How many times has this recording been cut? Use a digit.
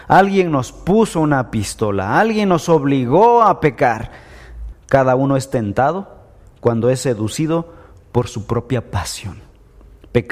1